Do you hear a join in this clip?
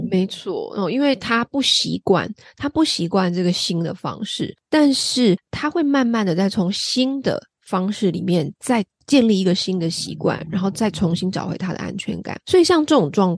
no; 0 cuts

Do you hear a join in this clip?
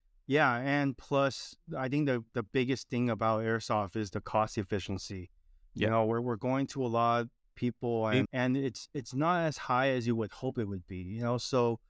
yes; 1 cut; at 8.3 s

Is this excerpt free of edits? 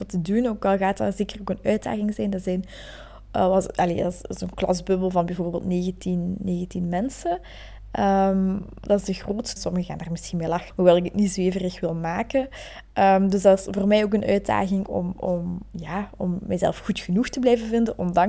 no; 2 cuts; at 9.6 s, 10.7 s

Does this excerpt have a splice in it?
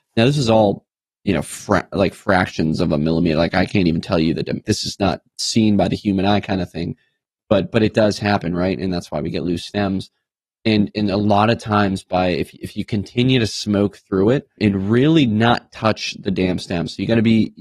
yes; 2 cuts; at 4.6 s, 14.6 s

